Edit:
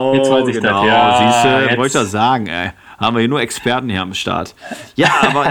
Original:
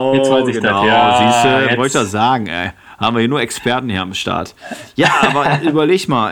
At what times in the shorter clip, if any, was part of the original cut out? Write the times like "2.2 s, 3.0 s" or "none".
none